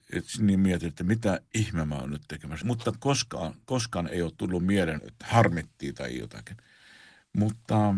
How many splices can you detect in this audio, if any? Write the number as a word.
two